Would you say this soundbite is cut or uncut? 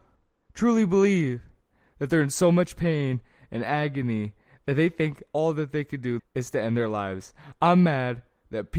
cut